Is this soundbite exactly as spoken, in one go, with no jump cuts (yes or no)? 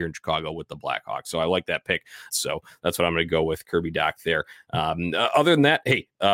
no